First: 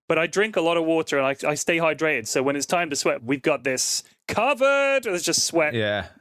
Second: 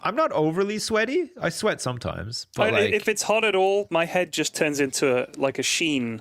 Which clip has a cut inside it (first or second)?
first